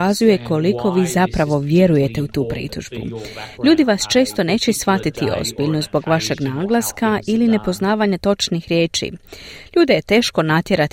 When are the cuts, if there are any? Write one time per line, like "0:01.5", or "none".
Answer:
none

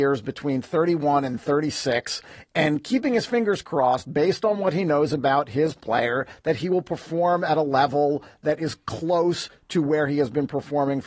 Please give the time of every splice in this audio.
0:02.5

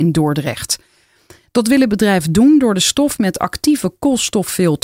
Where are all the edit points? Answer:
none

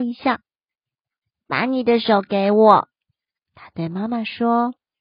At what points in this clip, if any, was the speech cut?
none

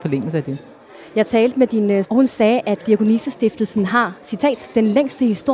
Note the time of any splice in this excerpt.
0:02.0

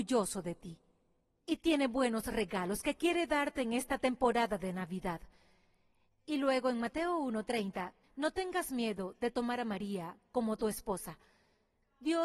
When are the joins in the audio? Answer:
0:08.0

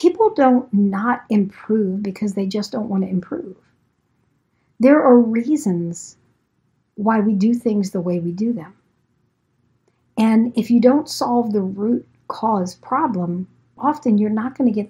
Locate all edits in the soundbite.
0:13.8

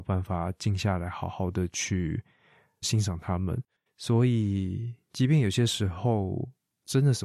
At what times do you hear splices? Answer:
0:03.9

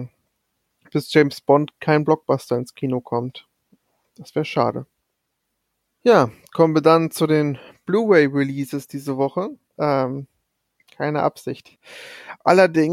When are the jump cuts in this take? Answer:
0:09.8

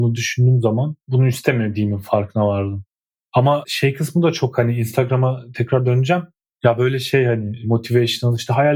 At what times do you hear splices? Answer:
none

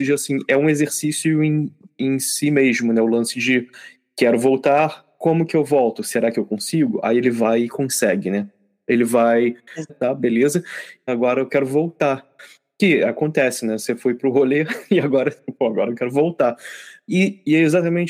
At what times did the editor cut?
0:09.9
0:11.1

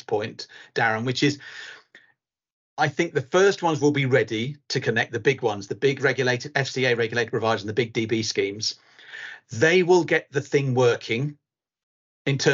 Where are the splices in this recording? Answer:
0:05.7

